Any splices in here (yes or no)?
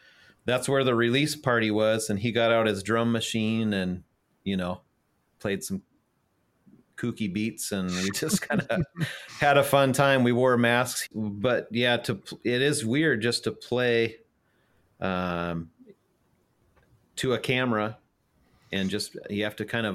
no